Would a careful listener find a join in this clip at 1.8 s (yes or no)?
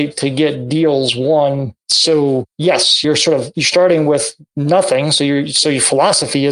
no